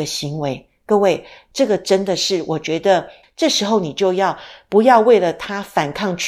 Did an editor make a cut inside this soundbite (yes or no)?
yes